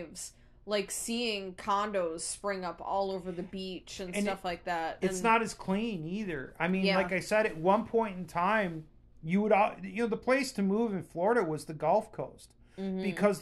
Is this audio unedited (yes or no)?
yes